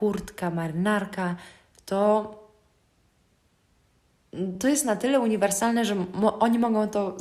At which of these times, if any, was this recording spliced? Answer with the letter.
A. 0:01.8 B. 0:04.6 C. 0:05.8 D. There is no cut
D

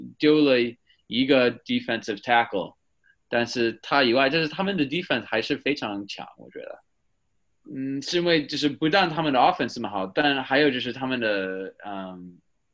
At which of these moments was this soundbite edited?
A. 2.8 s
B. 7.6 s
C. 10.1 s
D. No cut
B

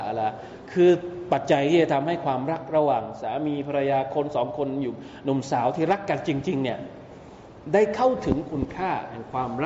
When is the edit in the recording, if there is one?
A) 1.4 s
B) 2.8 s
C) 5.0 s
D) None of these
A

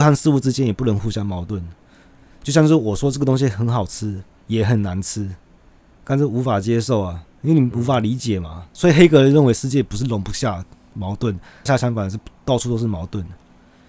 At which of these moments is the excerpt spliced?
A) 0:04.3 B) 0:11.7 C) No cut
B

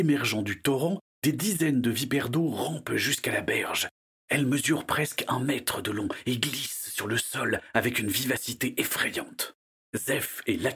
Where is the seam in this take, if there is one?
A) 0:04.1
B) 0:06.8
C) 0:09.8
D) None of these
D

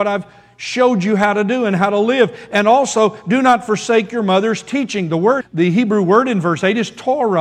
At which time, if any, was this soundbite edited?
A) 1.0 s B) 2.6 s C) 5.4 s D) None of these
C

